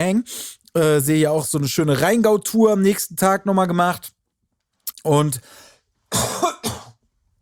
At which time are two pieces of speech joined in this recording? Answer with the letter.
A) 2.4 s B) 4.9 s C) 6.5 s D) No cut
B